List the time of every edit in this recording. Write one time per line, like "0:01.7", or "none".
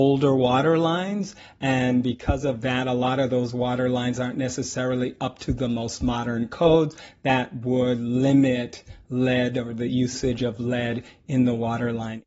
none